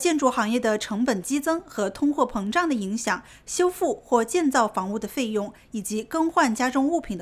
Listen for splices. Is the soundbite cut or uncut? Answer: uncut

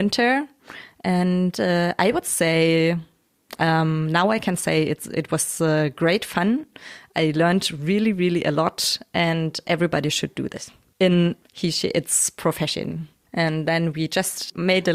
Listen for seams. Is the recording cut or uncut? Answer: cut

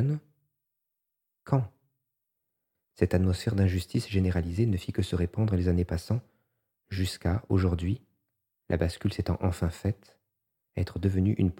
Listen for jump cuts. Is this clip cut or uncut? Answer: uncut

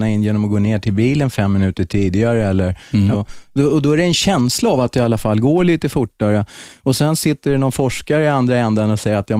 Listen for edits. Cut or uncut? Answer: cut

